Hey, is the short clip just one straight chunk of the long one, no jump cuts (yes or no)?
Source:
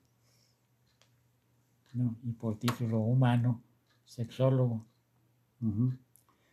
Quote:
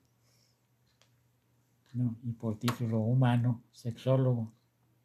no